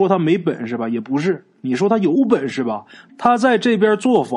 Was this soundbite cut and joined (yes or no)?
yes